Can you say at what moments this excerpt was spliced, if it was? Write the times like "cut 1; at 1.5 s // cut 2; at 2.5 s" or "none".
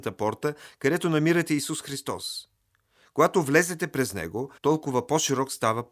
cut 1; at 4.6 s